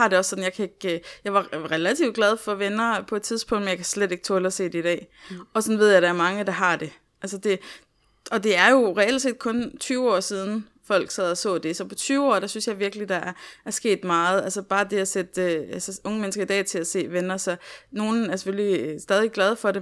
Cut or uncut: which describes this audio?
uncut